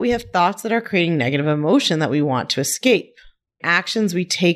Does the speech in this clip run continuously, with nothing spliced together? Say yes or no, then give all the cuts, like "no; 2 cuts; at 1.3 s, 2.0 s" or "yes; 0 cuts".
no; 1 cut; at 3.6 s